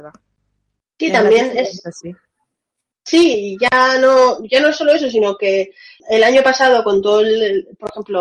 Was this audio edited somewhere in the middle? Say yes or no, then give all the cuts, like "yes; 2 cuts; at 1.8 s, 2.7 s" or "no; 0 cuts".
yes; 1 cut; at 6.0 s